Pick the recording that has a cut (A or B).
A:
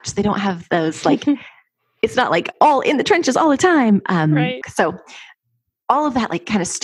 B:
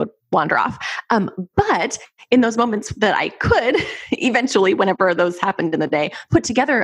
A